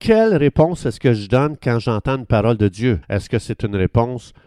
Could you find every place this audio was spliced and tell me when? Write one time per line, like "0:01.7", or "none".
0:03.0